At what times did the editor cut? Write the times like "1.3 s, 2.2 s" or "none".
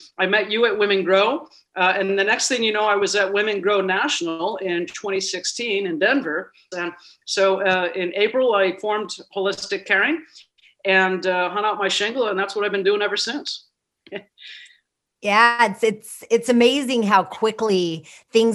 6.7 s